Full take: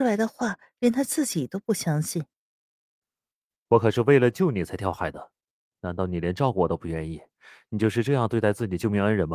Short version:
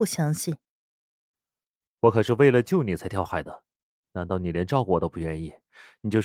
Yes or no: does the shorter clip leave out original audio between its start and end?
no